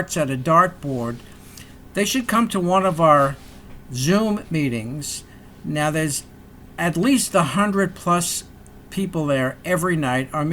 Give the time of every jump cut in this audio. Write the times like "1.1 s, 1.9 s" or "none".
none